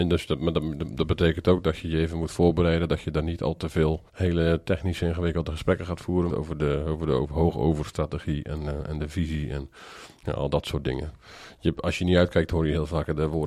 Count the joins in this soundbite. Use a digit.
2